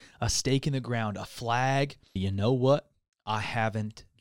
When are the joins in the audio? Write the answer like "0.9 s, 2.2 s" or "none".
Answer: 2.2 s